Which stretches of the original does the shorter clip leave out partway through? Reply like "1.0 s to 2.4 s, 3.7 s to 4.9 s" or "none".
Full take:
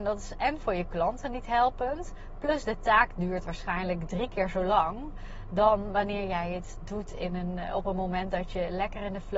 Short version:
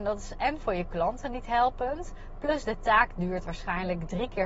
none